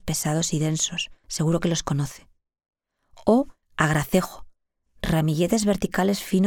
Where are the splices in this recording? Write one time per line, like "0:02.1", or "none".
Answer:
0:01.2
0:03.6